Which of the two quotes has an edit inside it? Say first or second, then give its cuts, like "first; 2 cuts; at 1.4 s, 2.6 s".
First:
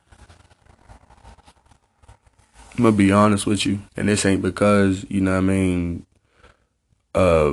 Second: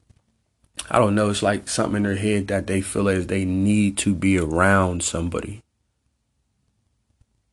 first; 1 cut; at 3.9 s